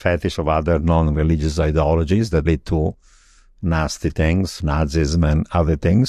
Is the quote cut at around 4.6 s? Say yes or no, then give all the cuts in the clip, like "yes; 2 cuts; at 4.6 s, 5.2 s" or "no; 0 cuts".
yes; 2 cuts; at 2.4 s, 4.6 s